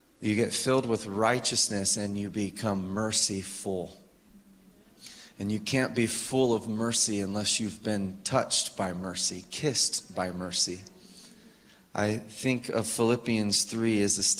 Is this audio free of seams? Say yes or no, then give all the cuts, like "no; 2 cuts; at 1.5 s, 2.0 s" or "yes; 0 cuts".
yes; 0 cuts